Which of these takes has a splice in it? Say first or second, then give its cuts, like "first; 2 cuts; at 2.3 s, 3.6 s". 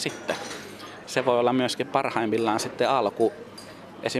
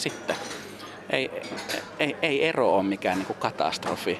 first; 1 cut; at 1.0 s